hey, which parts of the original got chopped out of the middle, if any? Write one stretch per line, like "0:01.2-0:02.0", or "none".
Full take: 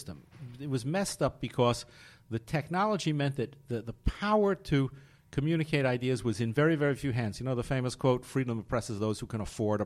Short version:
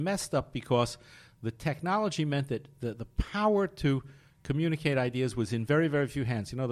none